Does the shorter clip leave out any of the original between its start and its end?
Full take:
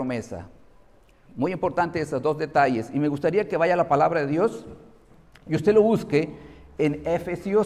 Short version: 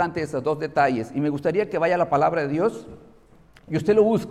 no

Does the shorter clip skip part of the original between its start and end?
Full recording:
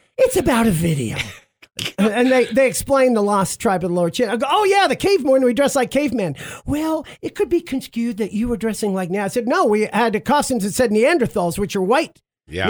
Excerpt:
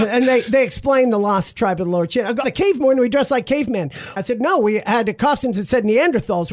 yes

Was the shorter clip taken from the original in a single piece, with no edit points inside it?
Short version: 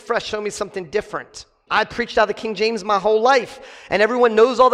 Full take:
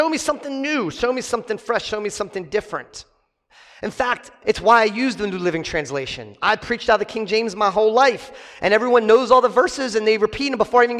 no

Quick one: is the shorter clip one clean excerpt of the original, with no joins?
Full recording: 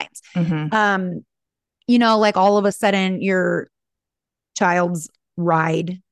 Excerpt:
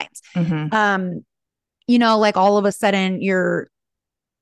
yes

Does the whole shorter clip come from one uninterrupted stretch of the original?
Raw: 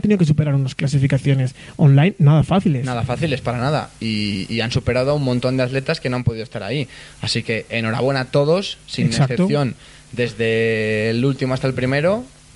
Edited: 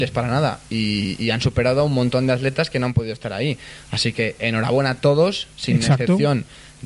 yes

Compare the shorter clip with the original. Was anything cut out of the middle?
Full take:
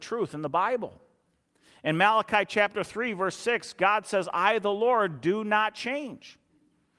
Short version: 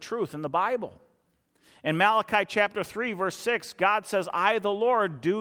no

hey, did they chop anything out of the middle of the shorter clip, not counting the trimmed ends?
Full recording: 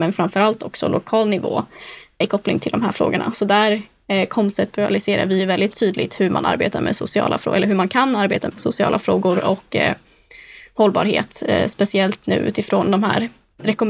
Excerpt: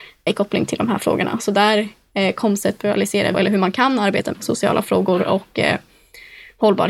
yes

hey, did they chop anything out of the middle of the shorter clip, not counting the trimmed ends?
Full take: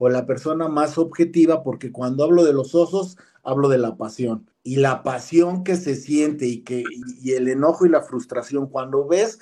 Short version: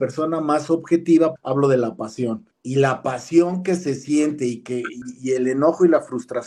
yes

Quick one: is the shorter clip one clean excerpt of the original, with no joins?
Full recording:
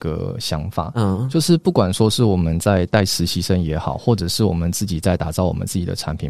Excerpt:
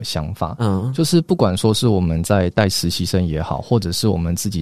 yes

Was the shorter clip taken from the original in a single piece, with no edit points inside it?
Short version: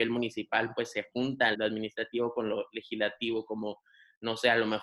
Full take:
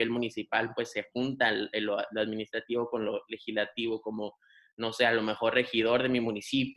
no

